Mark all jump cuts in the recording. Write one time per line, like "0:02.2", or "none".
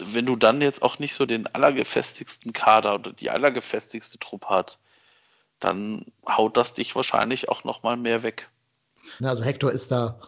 0:01.3
0:09.2